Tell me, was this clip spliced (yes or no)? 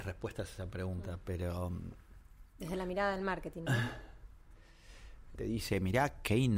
yes